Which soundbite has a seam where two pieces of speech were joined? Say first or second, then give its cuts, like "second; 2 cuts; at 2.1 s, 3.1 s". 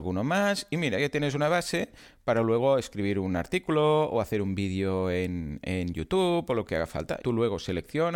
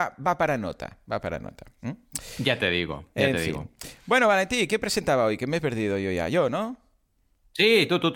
first; 1 cut; at 7.2 s